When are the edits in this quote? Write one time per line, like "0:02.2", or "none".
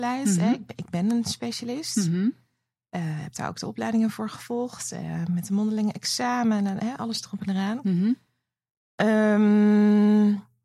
0:06.8

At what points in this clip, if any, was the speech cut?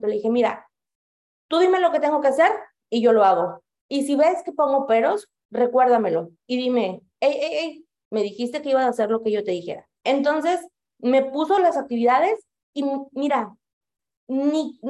0:10.0

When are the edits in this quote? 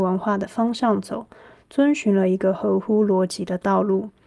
none

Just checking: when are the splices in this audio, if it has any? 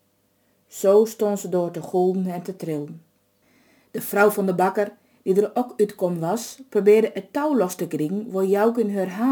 none

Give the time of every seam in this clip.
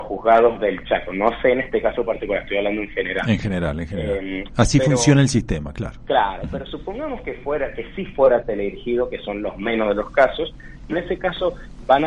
0:10.9

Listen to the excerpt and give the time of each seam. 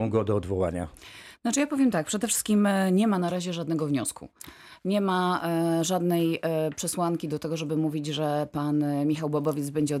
none

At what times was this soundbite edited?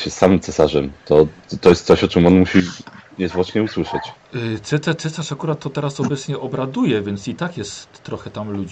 none

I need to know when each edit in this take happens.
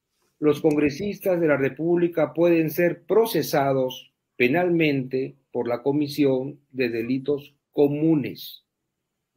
none

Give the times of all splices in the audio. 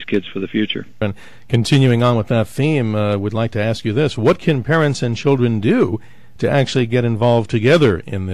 0:01.0

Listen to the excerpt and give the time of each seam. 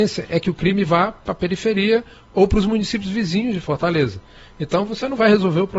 none

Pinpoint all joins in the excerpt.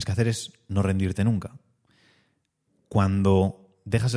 none

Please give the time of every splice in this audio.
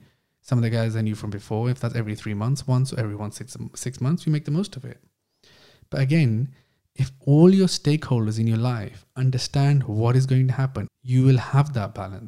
0:10.9

